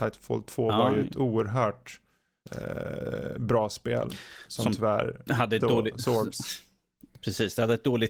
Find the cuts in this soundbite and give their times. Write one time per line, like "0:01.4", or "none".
0:05.6